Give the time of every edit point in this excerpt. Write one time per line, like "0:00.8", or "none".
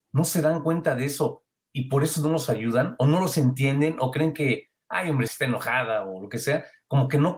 0:05.3

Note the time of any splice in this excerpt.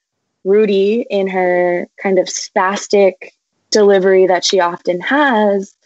none

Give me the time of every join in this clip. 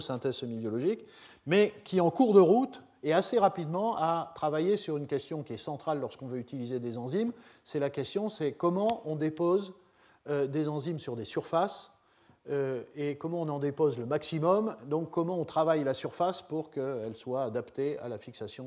none

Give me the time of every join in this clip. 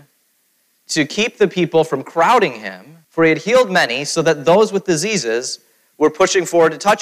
0:03.0

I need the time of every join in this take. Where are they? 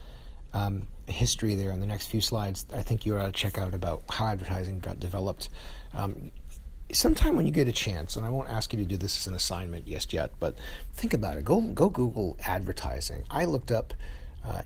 0:01.1

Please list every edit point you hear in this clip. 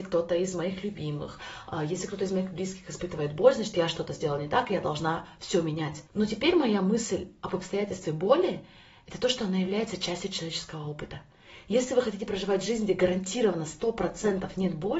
0:06.1

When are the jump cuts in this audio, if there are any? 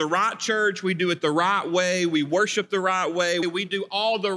0:03.4

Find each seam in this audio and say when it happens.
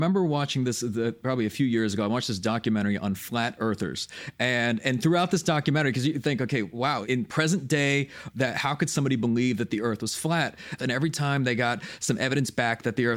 0:08.3
0:10.8

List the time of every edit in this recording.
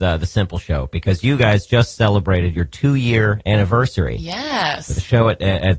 none

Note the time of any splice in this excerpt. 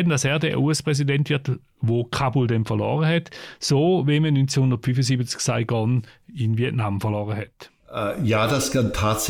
none

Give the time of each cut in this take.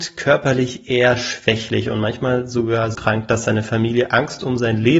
0:02.9

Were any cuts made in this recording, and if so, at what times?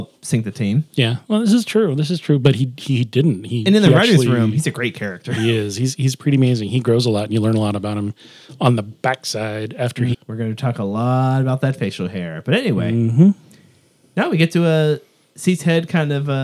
0:10.1

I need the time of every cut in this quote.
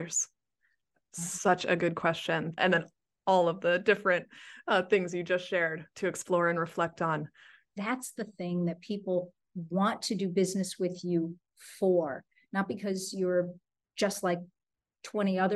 0:02.6
0:07.7

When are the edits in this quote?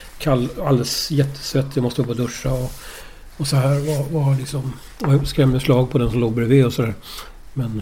none

